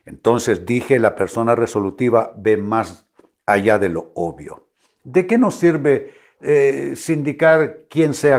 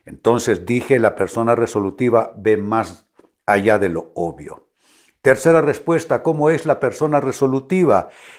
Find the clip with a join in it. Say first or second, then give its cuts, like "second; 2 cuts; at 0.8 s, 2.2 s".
first; 1 cut; at 4.9 s